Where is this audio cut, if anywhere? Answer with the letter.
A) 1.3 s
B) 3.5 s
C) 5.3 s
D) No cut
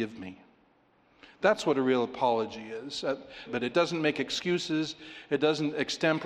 B